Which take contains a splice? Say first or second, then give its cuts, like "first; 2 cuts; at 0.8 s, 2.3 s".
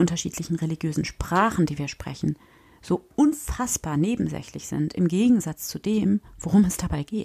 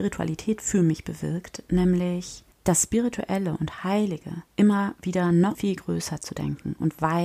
second; 3 cuts; at 2.5 s, 4.5 s, 5.5 s